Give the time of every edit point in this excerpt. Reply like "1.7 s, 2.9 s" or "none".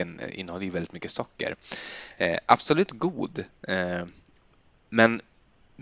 none